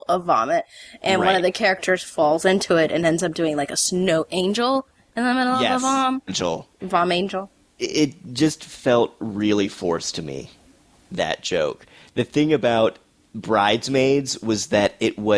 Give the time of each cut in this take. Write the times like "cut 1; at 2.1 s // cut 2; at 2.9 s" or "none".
cut 1; at 6.3 s